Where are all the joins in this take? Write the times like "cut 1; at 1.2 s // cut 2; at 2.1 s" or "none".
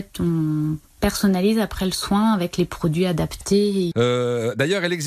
cut 1; at 3.9 s